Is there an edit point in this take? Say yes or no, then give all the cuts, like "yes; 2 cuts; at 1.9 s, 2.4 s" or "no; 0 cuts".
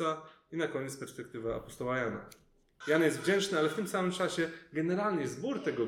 yes; 1 cut; at 2.8 s